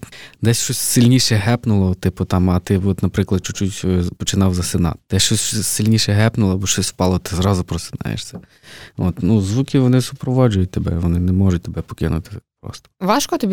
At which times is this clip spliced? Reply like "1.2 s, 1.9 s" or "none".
none